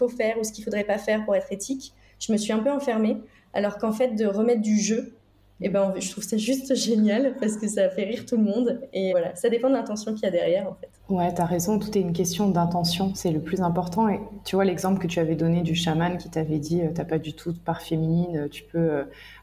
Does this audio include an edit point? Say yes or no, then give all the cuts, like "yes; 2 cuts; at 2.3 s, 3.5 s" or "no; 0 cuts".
yes; 2 cuts; at 9.1 s, 11.0 s